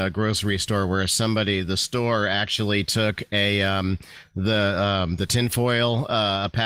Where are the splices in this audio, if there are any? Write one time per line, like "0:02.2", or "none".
none